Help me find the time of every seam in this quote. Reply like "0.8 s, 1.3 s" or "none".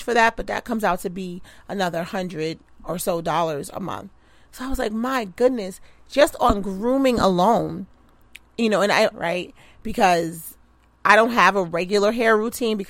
9.1 s

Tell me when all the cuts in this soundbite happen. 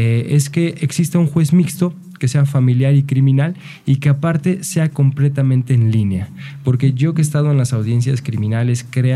none

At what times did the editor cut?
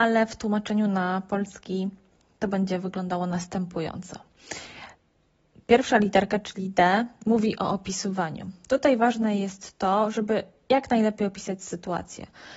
none

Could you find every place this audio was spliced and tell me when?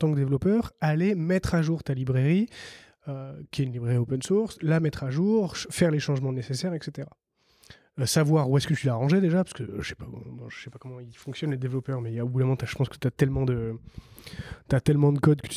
none

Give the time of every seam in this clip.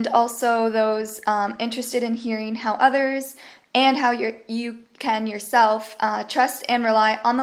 none

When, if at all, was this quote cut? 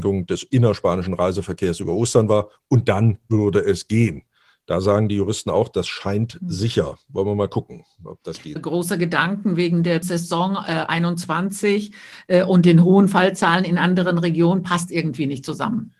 8.6 s

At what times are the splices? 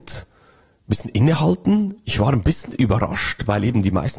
none

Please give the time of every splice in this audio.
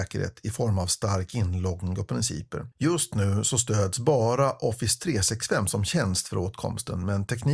2.7 s

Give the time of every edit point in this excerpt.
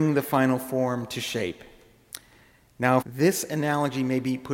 3.0 s

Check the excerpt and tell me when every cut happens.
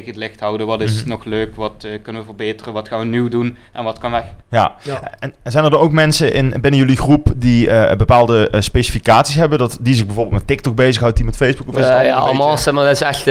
4.4 s, 11.1 s

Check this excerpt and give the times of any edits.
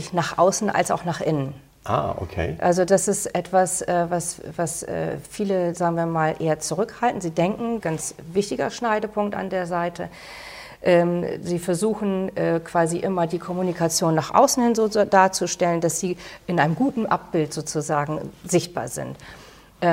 7.8 s

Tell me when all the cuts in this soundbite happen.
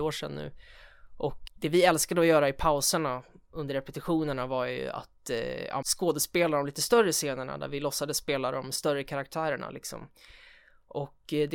1.5 s, 5.8 s

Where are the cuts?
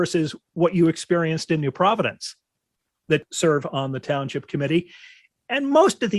3.1 s

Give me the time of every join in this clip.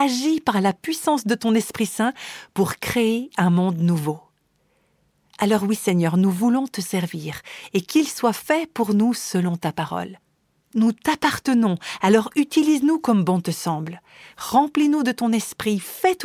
none

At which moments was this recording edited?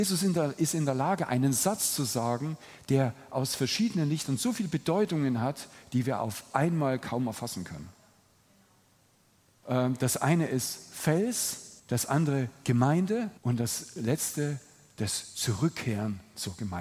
9.6 s, 11.8 s, 13.4 s

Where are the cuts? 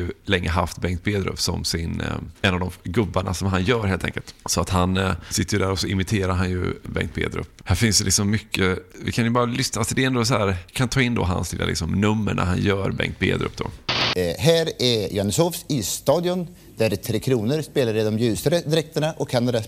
10.7 s

